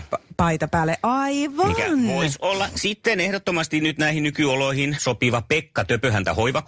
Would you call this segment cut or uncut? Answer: cut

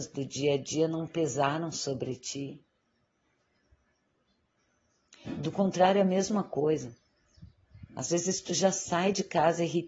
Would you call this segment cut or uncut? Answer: uncut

